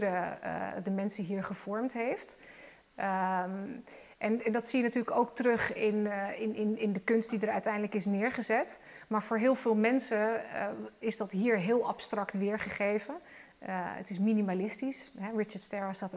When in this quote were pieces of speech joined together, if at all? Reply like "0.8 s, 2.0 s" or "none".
none

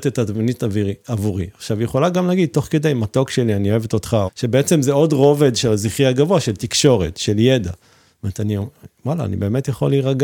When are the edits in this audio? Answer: 4.3 s

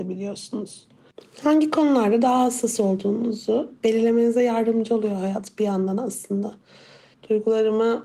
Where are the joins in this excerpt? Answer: 7.1 s

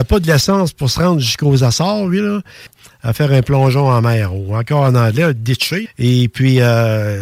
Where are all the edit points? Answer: 2.7 s, 5.9 s

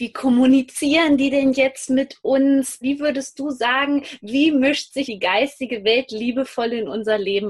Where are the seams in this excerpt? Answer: 2.8 s, 5.0 s

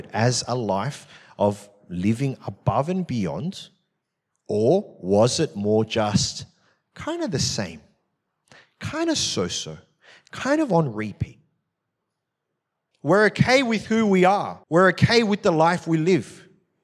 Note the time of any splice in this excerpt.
12.9 s, 14.6 s

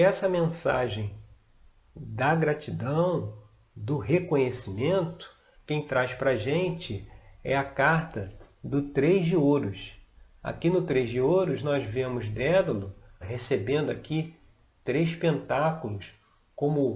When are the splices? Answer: 5.5 s, 13.2 s

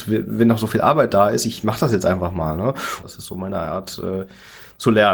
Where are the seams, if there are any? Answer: 3.0 s

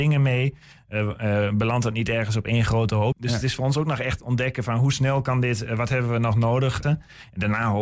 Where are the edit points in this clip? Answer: 3.1 s, 6.8 s

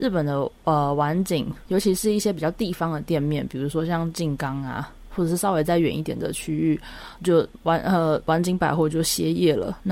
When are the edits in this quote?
7.2 s

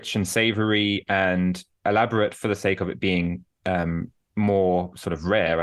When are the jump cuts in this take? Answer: none

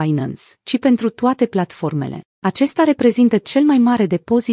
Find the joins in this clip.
none

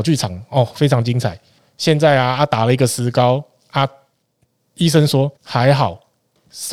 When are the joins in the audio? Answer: 1.6 s, 5.4 s

